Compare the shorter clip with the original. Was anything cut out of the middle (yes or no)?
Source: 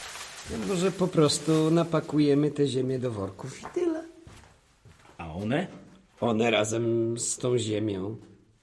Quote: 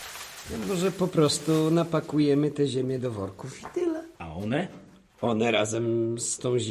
yes